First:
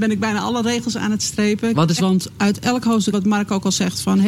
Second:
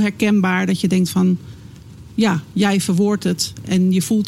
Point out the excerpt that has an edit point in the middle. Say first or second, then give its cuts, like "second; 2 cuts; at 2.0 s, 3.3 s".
first; 2 cuts; at 2.0 s, 3.1 s